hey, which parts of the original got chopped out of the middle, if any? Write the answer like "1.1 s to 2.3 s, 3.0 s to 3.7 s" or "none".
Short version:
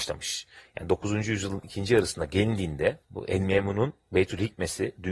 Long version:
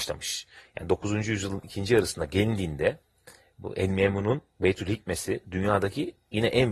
3.0 s to 3.5 s